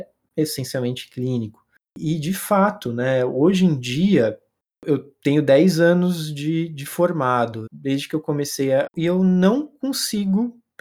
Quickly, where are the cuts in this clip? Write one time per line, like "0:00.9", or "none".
0:07.7
0:08.9